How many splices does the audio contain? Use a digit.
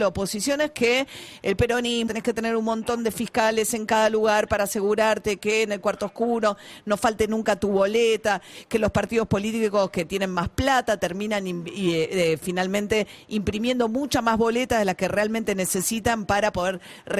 1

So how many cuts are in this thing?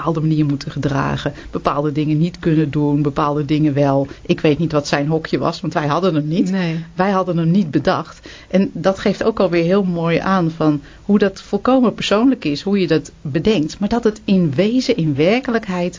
0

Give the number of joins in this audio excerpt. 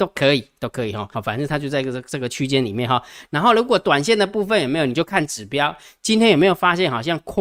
1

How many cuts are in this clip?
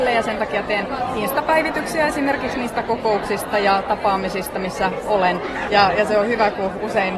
1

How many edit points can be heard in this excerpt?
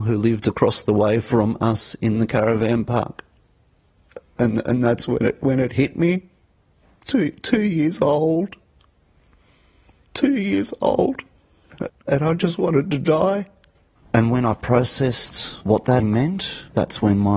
3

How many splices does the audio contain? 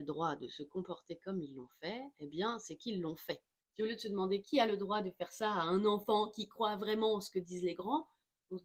1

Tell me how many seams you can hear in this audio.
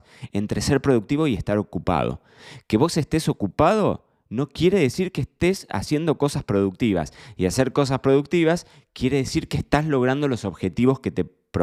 0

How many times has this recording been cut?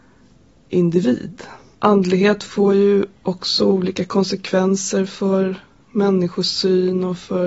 2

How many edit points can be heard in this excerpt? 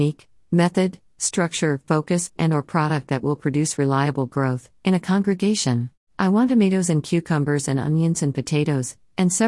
3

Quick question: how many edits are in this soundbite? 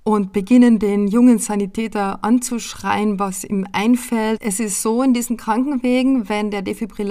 1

